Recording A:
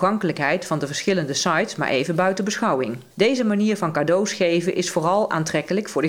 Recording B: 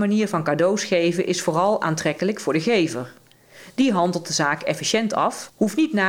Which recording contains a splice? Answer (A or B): A